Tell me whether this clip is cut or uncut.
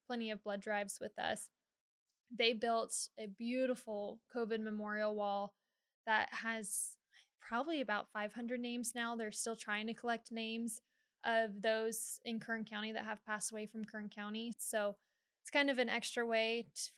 cut